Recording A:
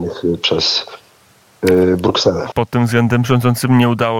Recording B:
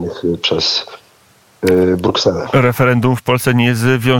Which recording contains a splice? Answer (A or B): A